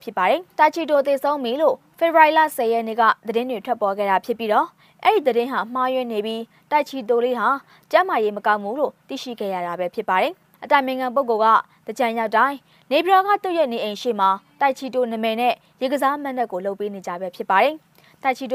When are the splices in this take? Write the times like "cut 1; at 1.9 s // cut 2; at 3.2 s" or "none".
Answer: cut 1; at 10.5 s